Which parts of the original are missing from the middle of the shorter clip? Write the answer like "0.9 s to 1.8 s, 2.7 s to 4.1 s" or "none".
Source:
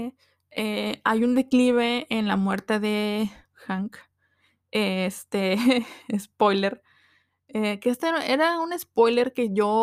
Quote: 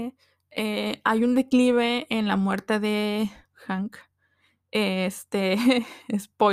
none